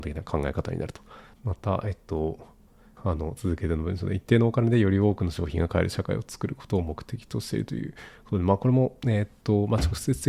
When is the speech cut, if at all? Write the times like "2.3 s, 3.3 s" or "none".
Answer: 1.3 s, 3.0 s